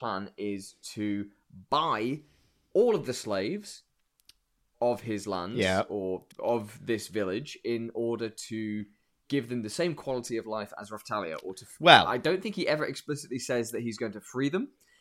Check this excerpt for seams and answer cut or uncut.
cut